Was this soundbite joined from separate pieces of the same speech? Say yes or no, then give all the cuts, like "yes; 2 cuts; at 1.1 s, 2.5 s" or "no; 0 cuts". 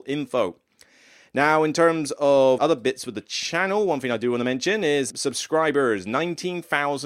yes; 2 cuts; at 2.6 s, 5.1 s